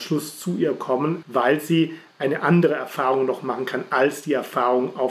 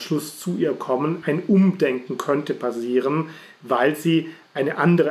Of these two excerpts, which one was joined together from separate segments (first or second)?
first